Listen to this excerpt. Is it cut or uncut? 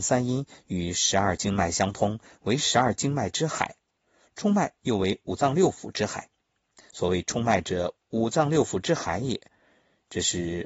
uncut